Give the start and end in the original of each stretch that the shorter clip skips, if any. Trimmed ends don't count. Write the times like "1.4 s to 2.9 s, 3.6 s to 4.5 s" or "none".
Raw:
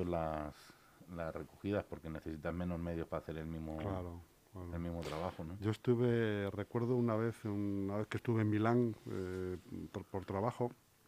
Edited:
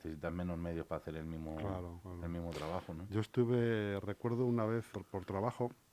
4.2 s to 4.5 s, 7.4 s to 9.9 s